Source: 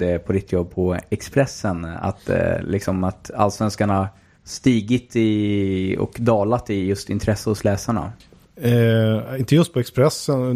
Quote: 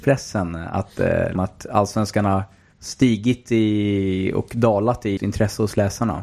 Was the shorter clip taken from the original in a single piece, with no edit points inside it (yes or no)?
no